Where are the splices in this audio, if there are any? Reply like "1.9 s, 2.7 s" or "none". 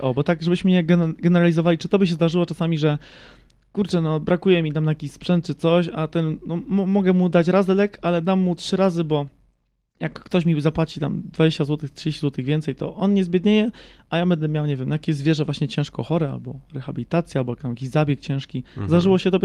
none